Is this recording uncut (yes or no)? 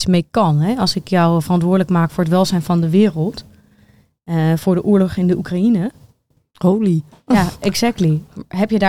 yes